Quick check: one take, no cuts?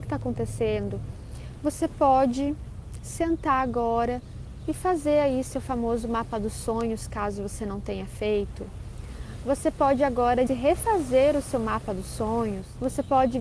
no; 1 cut; at 10.5 s

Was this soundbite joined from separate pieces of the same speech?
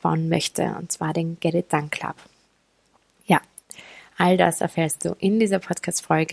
no; 0 cuts

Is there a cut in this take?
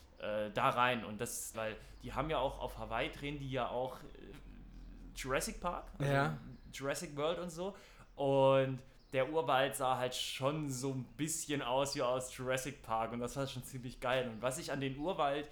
yes; 1 cut; at 1.5 s

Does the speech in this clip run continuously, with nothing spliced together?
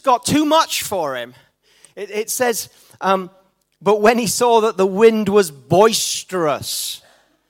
yes; 0 cuts

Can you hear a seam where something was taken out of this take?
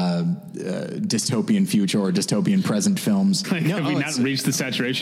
yes; 1 cut; at 3.4 s

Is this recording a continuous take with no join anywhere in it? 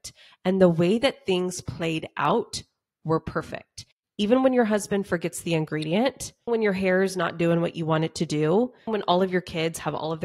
no; 2 cuts; at 6.5 s, 8.9 s

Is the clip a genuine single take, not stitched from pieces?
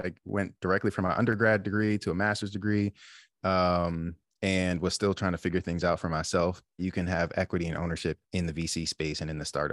no; 2 cuts; at 6.8 s, 8.2 s

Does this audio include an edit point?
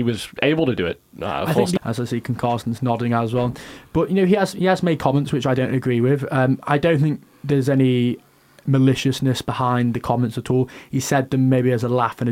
yes; 1 cut; at 1.8 s

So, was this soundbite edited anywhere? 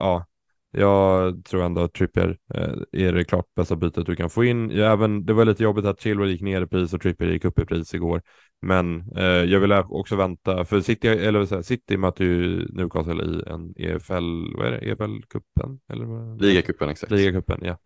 no; 0 cuts

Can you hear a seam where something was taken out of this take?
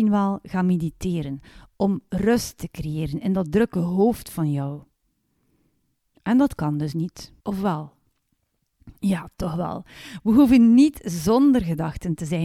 yes; 1 cut; at 7.4 s

